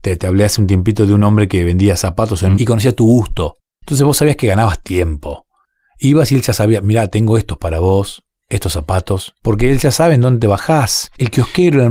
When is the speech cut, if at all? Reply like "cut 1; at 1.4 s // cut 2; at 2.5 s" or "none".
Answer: cut 1; at 2.6 s // cut 2; at 9.4 s